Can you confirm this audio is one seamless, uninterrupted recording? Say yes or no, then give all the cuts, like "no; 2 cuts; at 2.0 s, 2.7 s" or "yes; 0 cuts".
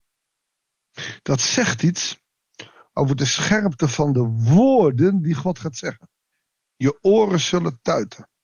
yes; 0 cuts